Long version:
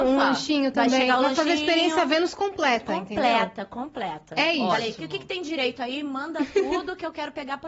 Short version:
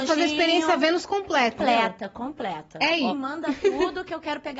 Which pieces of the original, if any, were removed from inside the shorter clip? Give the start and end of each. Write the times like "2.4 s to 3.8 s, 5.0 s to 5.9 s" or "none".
2.9 s to 3.1 s, 4.7 s to 6.0 s